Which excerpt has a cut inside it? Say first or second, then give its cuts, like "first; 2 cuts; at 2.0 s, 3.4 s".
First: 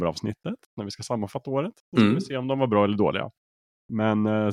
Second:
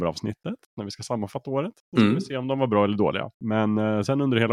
second; 1 cut; at 3.3 s